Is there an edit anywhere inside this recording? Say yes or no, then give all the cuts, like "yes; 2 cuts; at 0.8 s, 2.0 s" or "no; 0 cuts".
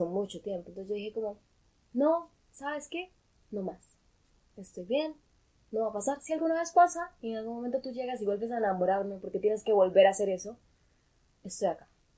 no; 0 cuts